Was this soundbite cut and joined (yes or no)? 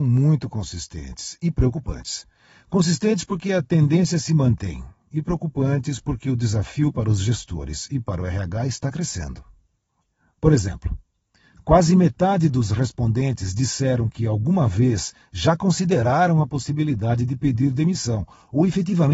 no